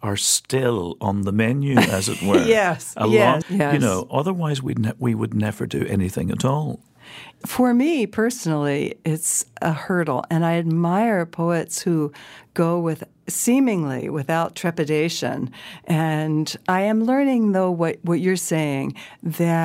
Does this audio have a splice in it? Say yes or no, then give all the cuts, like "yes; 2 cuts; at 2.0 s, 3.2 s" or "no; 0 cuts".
yes; 1 cut; at 3.4 s